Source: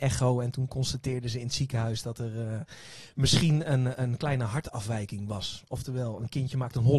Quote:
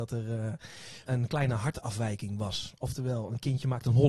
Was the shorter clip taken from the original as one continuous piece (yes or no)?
no